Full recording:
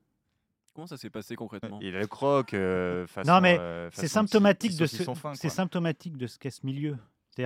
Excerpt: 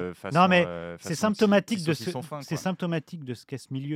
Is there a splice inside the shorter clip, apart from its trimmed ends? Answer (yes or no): no